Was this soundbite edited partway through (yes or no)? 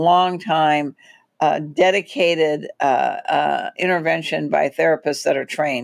no